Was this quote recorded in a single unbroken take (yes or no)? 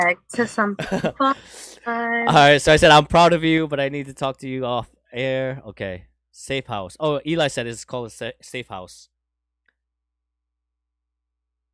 yes